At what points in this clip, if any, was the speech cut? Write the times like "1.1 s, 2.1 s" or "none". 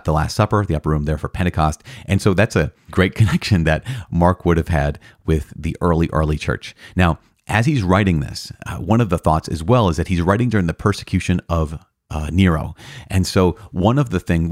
none